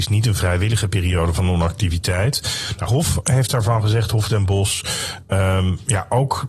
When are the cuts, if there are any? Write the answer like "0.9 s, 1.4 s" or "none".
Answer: 2.9 s